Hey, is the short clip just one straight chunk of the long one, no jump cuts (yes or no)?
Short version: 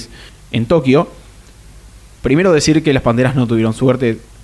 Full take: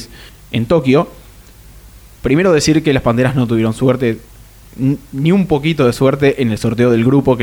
yes